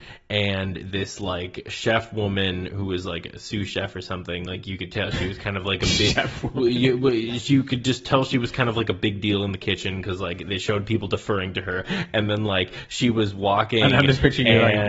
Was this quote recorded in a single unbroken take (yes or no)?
yes